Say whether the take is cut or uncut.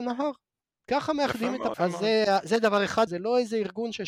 cut